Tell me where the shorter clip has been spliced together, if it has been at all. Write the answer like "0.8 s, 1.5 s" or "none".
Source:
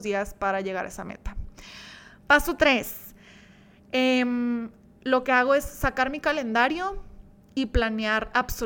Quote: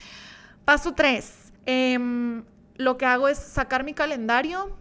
1.6 s

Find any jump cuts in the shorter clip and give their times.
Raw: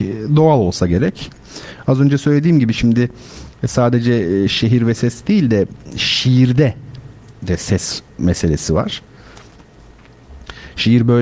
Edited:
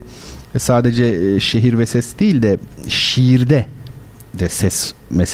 none

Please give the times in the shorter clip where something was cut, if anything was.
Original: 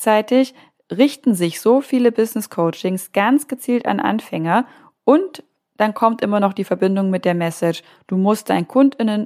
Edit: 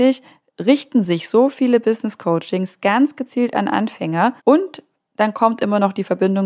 4.4 s

